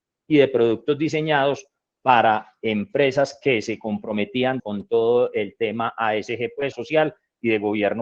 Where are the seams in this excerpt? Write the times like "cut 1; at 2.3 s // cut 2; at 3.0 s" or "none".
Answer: cut 1; at 4.6 s // cut 2; at 6.7 s